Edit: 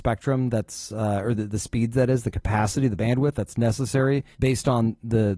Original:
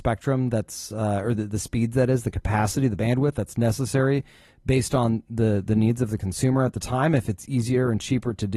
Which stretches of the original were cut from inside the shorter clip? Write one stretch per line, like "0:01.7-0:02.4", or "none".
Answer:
0:04.3-0:04.6